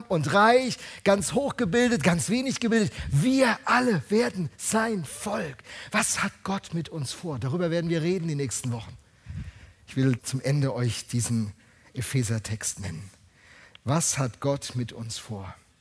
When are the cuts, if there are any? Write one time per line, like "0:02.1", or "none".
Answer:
0:10.2